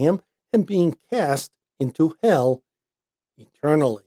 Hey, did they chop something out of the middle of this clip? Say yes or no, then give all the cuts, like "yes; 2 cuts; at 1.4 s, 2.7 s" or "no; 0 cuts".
no; 0 cuts